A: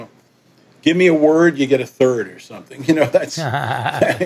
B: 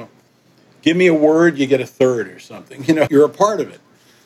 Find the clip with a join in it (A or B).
B